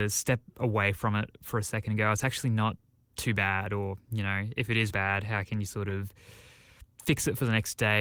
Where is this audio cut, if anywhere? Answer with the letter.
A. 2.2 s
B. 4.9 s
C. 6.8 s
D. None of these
B